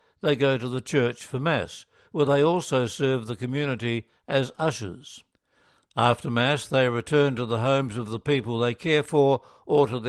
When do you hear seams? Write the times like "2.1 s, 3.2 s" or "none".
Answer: none